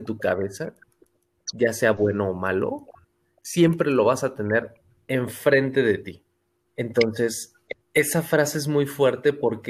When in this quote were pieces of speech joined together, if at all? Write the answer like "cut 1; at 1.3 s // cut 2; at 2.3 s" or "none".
cut 1; at 6.7 s // cut 2; at 7.8 s